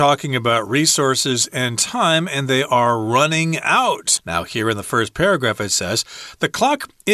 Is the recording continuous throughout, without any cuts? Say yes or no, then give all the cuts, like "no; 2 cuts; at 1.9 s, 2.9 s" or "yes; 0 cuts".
no; 1 cut; at 4.2 s